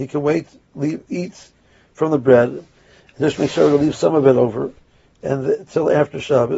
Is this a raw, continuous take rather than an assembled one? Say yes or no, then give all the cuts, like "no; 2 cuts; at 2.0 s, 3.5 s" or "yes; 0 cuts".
yes; 0 cuts